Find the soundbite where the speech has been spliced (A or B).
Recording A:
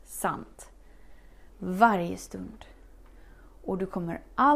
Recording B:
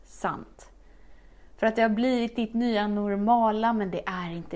A